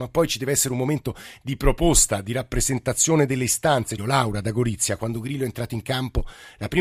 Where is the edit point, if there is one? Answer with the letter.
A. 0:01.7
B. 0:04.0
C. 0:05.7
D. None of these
B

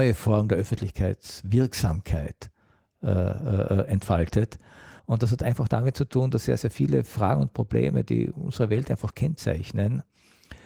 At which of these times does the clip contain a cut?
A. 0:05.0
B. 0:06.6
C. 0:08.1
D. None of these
A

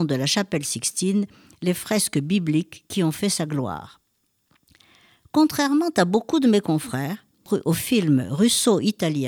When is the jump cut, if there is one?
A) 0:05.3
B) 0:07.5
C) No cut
B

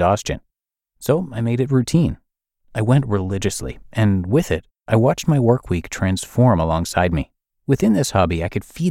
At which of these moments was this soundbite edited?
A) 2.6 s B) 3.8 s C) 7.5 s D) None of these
C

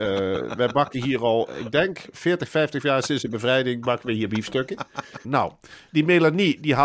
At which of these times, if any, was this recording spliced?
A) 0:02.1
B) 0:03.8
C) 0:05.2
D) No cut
C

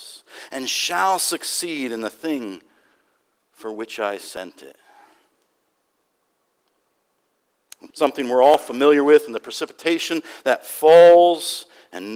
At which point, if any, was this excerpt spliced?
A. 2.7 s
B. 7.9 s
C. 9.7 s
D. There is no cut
B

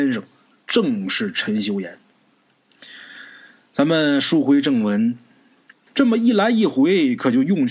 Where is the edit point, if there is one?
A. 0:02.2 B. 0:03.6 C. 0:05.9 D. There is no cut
C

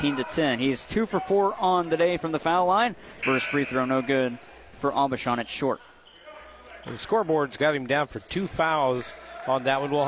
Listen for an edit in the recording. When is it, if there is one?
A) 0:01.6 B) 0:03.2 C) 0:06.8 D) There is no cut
B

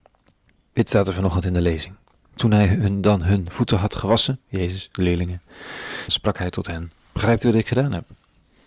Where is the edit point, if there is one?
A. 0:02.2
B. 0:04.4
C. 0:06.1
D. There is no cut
C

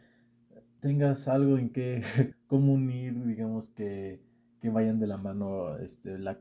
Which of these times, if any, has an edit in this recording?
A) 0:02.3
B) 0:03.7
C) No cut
A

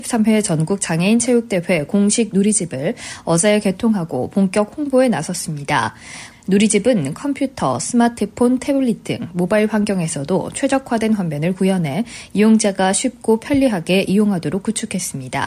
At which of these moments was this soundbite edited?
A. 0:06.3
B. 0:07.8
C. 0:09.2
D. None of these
A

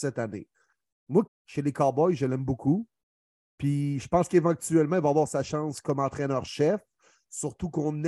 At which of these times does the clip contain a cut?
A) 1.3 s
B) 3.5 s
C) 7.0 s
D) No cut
A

